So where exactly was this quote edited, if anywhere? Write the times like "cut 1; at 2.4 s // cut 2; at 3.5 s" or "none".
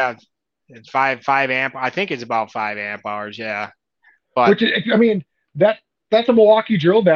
none

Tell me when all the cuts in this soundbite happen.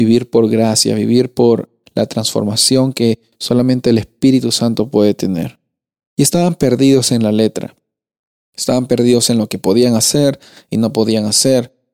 none

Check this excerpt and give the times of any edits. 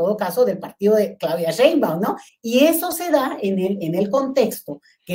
cut 1; at 2.3 s

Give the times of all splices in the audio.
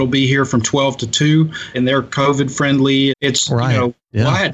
cut 1; at 1.7 s // cut 2; at 3.1 s

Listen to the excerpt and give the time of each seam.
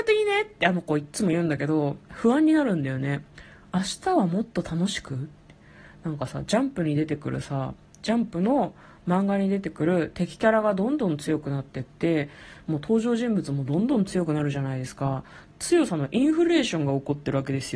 none

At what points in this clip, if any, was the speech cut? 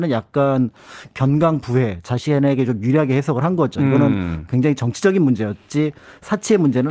none

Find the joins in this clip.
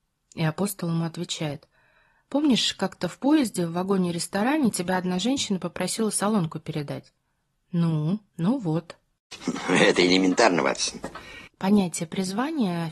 cut 1; at 8.3 s

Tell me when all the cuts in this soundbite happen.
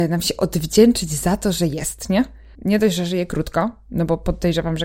cut 1; at 2.5 s

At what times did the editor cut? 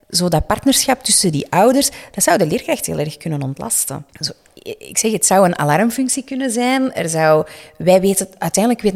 cut 1; at 4.1 s

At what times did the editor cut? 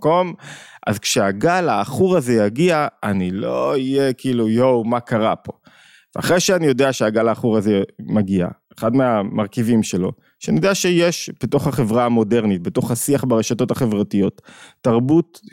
none

